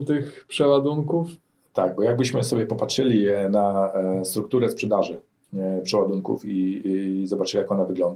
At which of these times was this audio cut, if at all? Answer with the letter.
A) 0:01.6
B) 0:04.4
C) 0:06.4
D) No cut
D